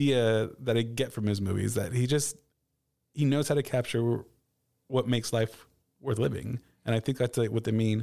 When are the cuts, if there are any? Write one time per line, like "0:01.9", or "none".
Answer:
none